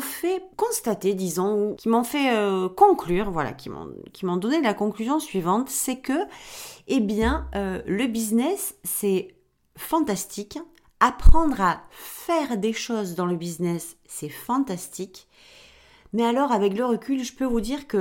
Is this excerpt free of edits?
yes; 0 cuts

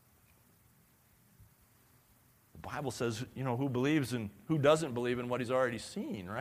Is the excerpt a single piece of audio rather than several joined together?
yes; 0 cuts

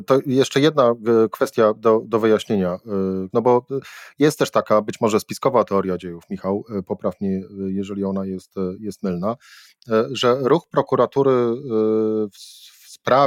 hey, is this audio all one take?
no; 1 cut; at 3.3 s

